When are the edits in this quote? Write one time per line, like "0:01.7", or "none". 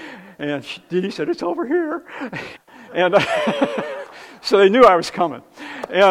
0:02.5